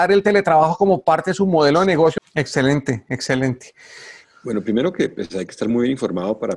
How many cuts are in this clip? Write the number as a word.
two